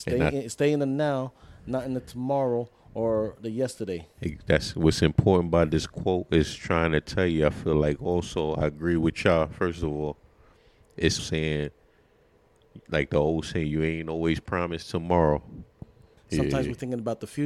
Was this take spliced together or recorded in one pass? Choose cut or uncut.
cut